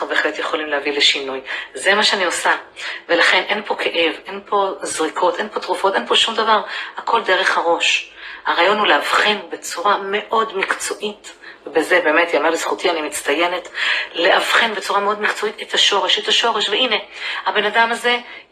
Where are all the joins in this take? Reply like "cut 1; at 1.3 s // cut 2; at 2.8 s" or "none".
none